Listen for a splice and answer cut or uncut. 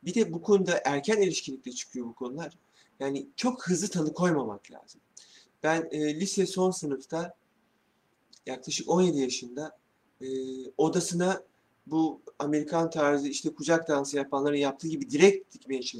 uncut